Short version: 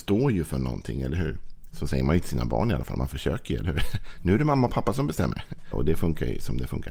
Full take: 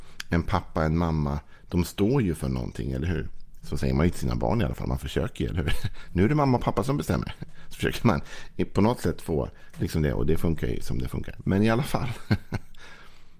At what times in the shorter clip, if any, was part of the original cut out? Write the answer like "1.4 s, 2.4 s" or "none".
5.7 s

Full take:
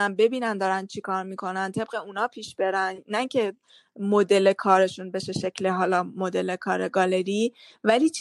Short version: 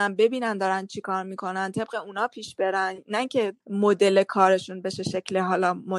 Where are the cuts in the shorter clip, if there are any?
3.6 s

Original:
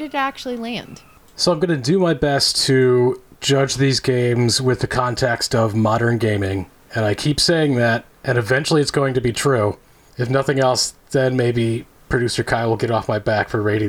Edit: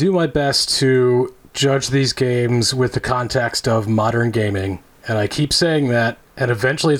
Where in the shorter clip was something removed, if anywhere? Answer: none

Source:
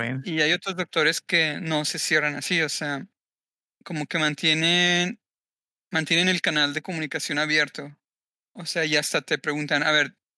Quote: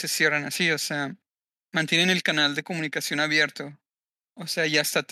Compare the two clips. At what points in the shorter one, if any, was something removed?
1.6 s

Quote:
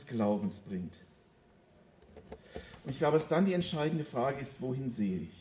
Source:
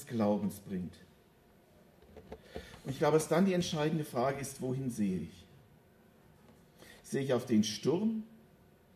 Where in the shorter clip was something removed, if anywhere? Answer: none

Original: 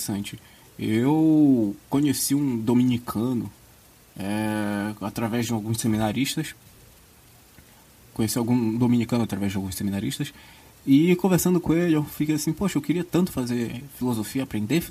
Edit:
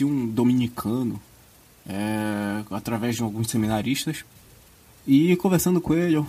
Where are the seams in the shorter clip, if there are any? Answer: 4.9 s

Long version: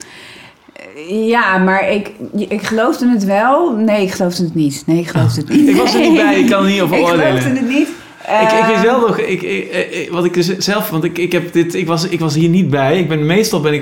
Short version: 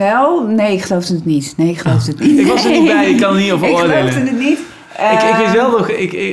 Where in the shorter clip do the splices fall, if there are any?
none

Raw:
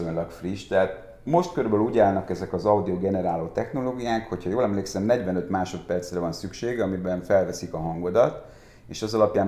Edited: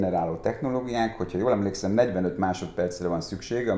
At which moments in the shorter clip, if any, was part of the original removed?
none

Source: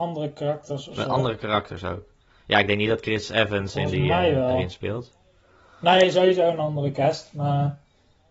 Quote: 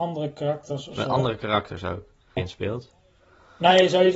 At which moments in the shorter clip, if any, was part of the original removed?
2.4 s

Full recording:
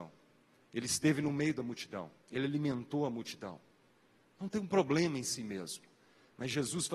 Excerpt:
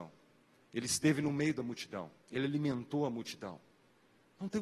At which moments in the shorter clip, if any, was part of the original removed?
none

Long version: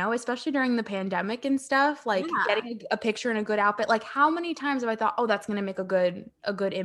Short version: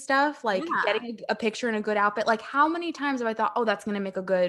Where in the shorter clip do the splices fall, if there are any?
none

